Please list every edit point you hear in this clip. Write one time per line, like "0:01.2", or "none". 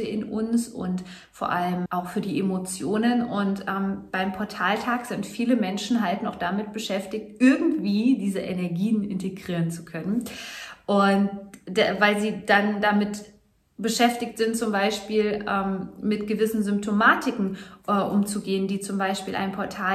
0:01.9